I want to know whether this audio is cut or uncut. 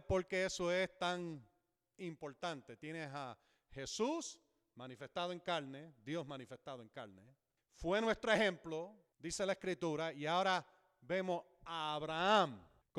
uncut